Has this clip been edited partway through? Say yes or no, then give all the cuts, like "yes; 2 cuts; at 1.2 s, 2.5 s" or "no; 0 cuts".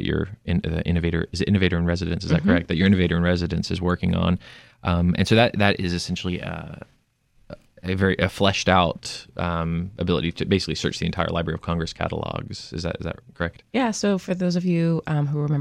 no; 0 cuts